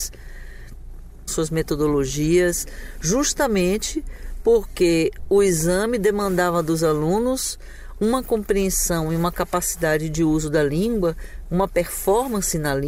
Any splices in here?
yes; 2 cuts; at 1.3 s, 11.5 s

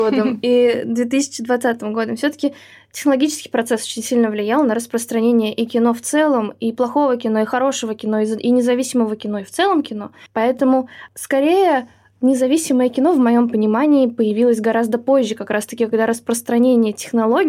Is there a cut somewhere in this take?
yes; 1 cut; at 10.3 s

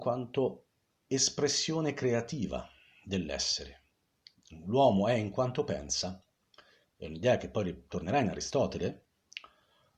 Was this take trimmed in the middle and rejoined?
no; 0 cuts

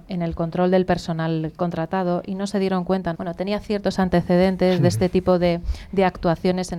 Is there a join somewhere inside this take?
yes; 1 cut; at 3.1 s

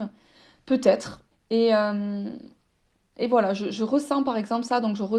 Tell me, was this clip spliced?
yes; 1 cut; at 1.3 s

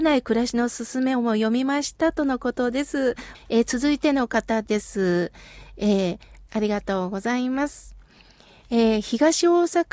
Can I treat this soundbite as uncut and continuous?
no; 2 cuts; at 3.3 s, 6.5 s

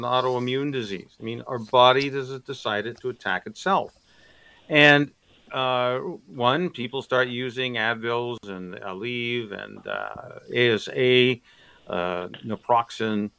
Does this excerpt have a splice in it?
no; 0 cuts

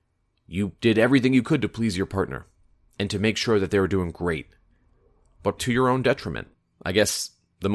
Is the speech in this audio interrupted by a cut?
yes; 1 cut; at 5.6 s

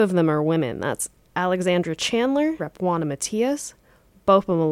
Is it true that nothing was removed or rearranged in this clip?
no; 1 cut; at 2.6 s

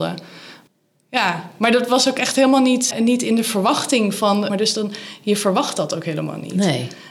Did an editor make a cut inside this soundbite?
yes; 2 cuts; at 2.9 s, 4.5 s

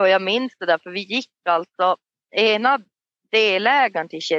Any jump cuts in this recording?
no; 0 cuts

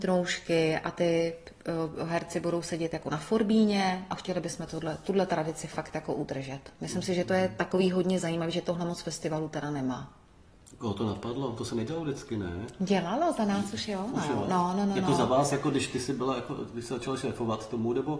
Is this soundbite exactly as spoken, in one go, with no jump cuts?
yes; 0 cuts

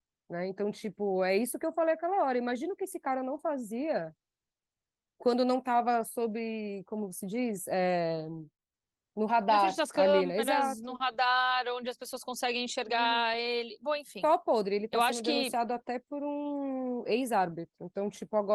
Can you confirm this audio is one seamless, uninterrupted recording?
yes; 0 cuts

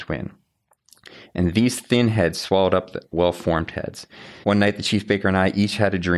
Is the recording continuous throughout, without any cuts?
no; 2 cuts; at 3.1 s, 4.4 s

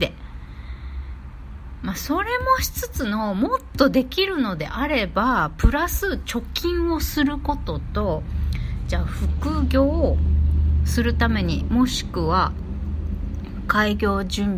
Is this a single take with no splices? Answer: yes; 0 cuts

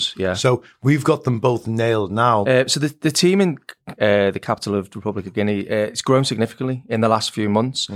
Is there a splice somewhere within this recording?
yes; 2 cuts; at 2.4 s, 4.0 s

